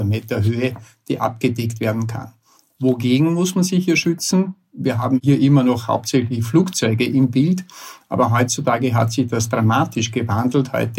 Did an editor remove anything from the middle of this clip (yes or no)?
no